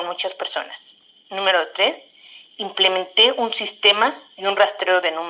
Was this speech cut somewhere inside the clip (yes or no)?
no